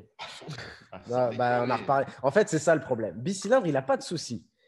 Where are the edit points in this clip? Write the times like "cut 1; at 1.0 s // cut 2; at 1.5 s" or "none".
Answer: none

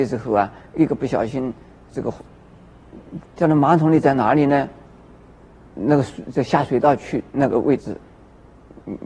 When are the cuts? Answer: cut 1; at 3.2 s // cut 2; at 5.7 s

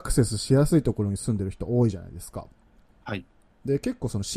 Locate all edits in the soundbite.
none

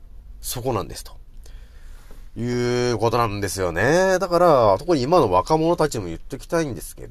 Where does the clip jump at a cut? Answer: none

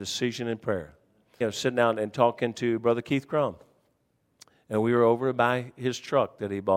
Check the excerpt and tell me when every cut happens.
cut 1; at 1.4 s

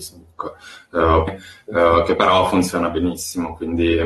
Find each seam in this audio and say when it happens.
cut 1; at 1.3 s

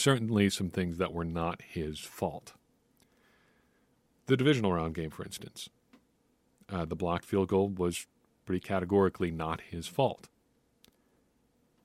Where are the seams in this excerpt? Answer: none

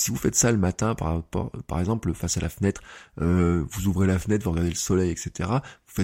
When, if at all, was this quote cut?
none

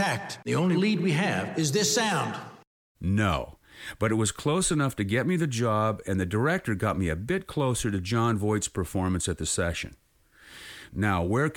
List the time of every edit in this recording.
cut 1; at 2.9 s

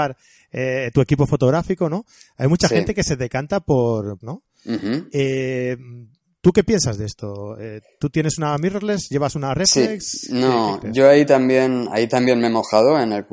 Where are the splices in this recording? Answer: cut 1; at 4.2 s

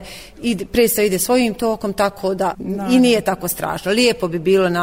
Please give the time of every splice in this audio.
cut 1; at 2.5 s

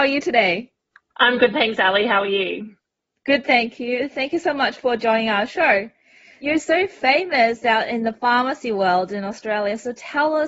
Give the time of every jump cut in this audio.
none

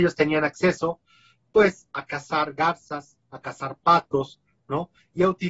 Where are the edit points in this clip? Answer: none

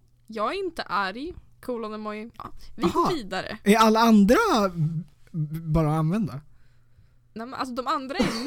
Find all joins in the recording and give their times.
cut 1; at 2.3 s

